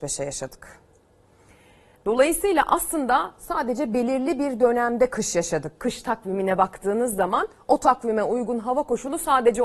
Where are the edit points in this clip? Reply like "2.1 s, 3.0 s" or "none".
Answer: none